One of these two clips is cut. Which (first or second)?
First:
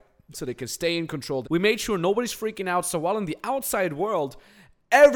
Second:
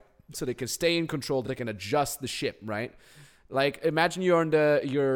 first